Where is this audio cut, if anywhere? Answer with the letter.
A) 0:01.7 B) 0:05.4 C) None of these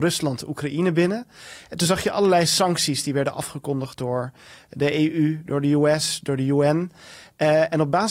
C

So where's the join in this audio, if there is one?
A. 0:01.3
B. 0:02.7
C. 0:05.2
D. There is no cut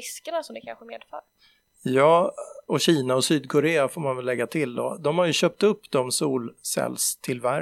B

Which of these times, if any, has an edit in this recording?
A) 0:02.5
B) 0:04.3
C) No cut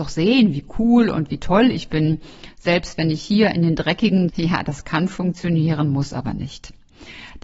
B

